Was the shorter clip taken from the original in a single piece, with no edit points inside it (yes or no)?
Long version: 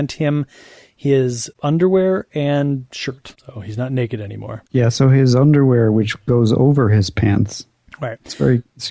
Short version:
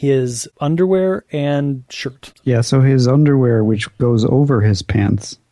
no